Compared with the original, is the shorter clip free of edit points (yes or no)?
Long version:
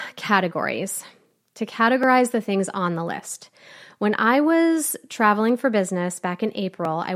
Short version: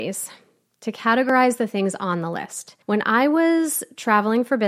no